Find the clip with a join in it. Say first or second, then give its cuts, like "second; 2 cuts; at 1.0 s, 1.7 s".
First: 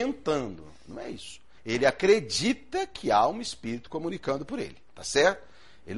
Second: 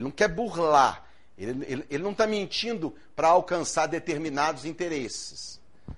first; 1 cut; at 1.6 s